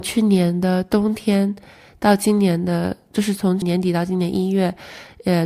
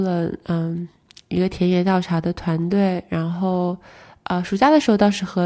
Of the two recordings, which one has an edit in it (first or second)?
first